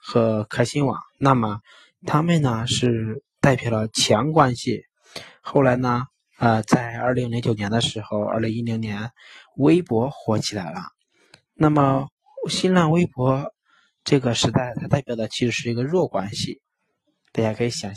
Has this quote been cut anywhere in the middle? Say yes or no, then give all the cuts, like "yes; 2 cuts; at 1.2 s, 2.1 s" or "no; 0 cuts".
no; 0 cuts